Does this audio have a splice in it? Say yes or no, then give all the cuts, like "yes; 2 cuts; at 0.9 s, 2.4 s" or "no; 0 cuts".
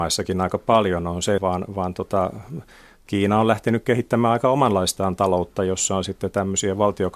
yes; 1 cut; at 1.4 s